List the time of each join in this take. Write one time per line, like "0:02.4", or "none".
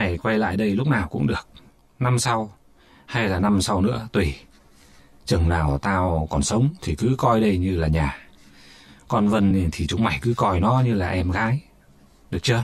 none